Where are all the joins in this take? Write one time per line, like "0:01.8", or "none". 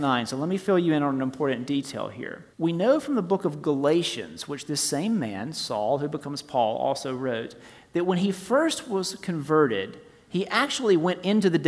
0:02.5